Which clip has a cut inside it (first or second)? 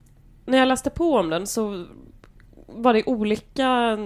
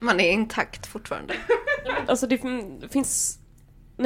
second